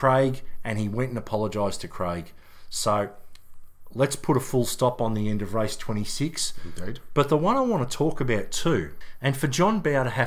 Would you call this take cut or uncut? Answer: uncut